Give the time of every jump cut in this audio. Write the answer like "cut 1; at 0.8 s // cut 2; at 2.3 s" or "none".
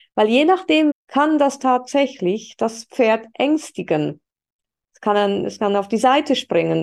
cut 1; at 0.9 s // cut 2; at 4.9 s